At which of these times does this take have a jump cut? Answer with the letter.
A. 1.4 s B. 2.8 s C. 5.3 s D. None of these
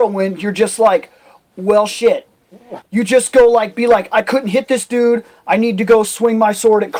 B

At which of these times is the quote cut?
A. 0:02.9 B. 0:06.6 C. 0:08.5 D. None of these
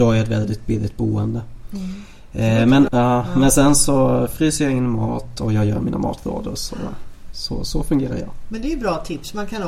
A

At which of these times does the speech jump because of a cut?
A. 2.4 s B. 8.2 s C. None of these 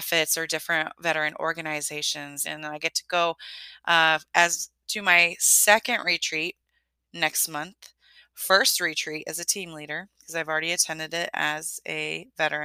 A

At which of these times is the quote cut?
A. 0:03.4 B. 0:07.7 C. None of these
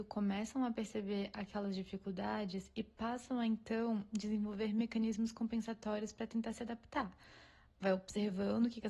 C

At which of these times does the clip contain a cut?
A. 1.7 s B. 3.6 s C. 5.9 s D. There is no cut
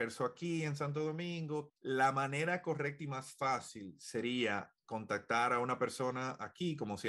A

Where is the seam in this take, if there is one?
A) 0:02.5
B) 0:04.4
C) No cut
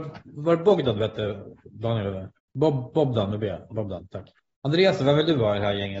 A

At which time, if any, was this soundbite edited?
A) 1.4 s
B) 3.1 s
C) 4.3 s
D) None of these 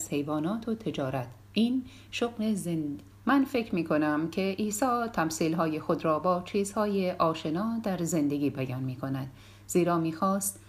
B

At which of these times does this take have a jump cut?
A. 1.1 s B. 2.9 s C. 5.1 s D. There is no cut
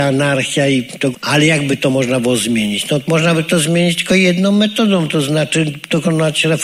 A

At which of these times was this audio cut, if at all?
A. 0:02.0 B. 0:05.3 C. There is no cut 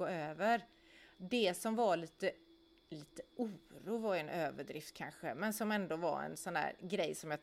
C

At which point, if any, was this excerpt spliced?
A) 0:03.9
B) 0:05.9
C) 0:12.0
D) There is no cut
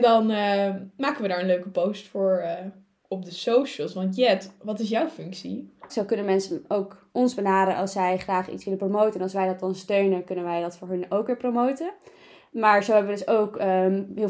B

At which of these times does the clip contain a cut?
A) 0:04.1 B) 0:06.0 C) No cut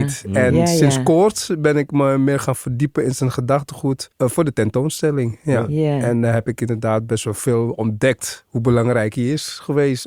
A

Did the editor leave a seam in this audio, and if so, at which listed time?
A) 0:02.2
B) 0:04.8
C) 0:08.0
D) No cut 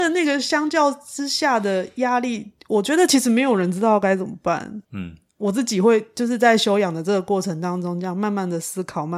B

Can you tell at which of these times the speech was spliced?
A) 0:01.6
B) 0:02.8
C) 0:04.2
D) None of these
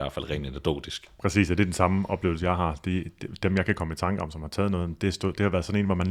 D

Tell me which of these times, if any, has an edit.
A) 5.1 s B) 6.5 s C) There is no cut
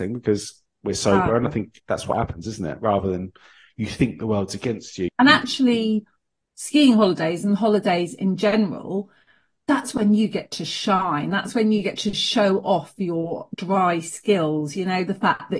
A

